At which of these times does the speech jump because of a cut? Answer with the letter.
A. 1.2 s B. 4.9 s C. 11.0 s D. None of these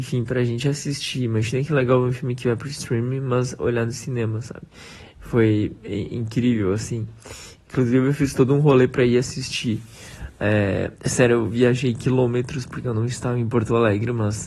C